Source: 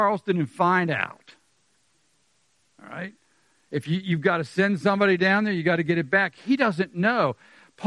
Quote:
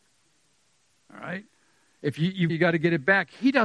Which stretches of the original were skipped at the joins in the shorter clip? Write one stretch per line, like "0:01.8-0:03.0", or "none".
0:04.2-0:05.5